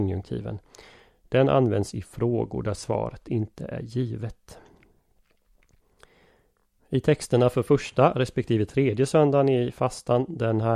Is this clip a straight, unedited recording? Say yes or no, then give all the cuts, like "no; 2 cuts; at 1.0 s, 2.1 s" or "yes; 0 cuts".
yes; 0 cuts